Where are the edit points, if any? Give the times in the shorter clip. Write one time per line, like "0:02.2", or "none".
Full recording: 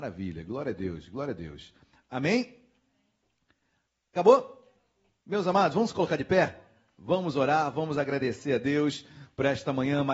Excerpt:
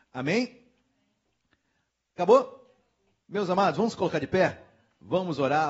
none